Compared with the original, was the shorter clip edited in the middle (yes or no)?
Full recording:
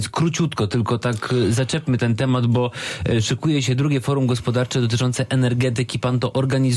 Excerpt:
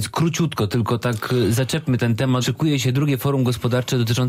yes